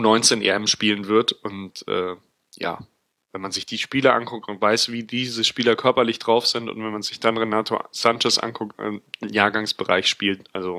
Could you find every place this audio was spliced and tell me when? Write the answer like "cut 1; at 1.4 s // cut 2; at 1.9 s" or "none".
cut 1; at 3.2 s // cut 2; at 8.7 s